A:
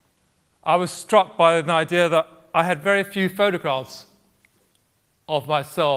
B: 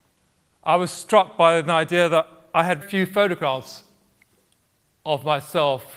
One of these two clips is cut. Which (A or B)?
B